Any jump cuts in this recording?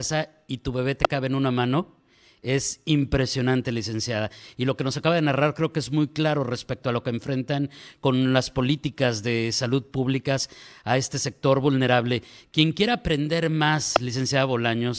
no; 0 cuts

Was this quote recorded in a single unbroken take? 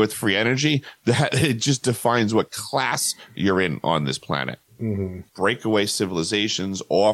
no; 1 cut; at 5.3 s

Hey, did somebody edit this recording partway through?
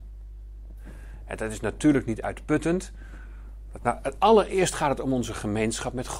yes; 2 cuts; at 1.2 s, 3.8 s

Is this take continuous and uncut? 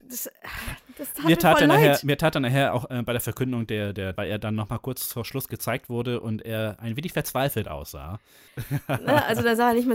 no; 2 cuts; at 4.2 s, 8.5 s

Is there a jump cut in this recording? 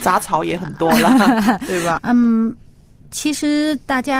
yes; 1 cut; at 1.9 s

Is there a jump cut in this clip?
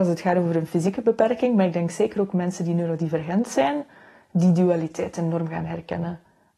no; 0 cuts

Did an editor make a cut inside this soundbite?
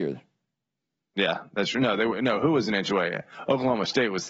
no; 0 cuts

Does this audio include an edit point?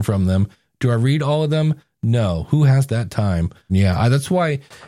yes; 1 cut; at 3.7 s

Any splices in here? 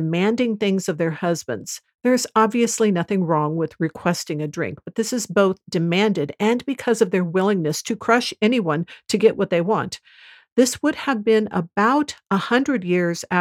no; 0 cuts

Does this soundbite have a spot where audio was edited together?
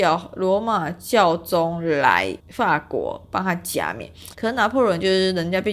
yes; 2 cuts; at 2.4 s, 4.3 s

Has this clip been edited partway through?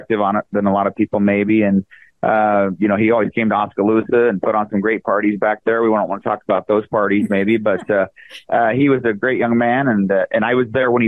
no; 0 cuts

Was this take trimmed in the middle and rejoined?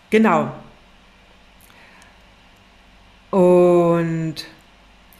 no; 0 cuts

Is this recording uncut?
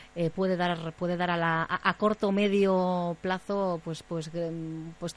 yes; 0 cuts

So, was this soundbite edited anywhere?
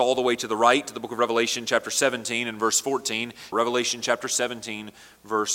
yes; 1 cut; at 3.5 s

